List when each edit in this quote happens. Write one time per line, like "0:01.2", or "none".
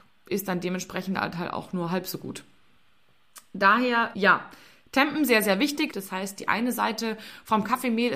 0:04.1
0:05.9